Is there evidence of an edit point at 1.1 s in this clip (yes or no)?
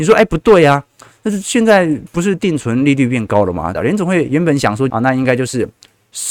no